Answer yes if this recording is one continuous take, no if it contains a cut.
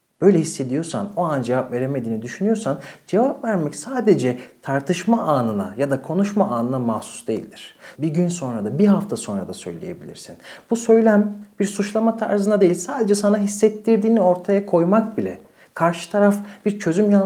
no